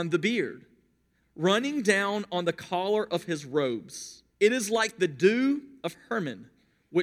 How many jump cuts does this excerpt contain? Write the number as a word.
two